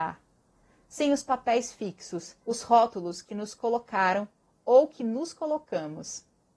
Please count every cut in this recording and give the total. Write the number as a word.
one